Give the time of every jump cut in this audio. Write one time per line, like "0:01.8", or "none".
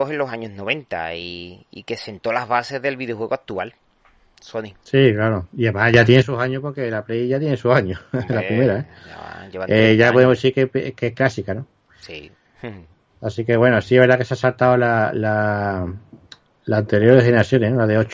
none